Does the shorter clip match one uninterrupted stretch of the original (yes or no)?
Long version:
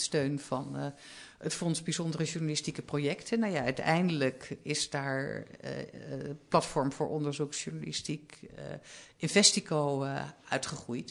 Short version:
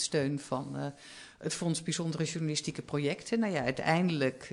yes